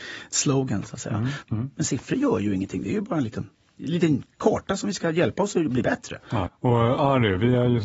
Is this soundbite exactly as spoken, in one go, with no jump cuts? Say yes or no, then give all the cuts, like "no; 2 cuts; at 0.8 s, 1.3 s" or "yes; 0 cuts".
no; 2 cuts; at 1.4 s, 6.5 s